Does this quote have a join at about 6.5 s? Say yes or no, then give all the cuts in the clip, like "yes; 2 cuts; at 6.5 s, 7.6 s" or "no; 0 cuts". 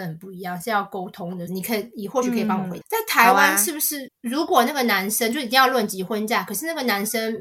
no; 3 cuts; at 1.5 s, 2.8 s, 4.1 s